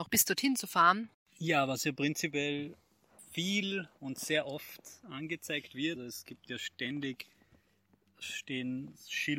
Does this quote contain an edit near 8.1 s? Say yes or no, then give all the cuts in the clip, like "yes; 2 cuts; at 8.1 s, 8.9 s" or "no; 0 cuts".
no; 2 cuts; at 1.1 s, 6.0 s